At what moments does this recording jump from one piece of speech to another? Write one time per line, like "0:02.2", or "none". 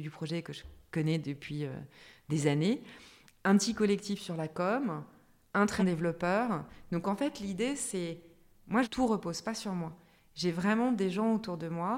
0:05.8
0:08.8